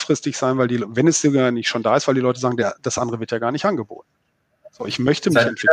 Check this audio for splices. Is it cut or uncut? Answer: uncut